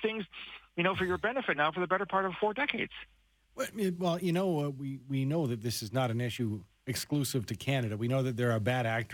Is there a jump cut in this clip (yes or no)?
no